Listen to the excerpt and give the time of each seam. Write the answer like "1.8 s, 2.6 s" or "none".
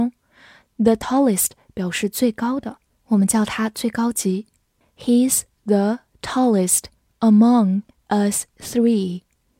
4.8 s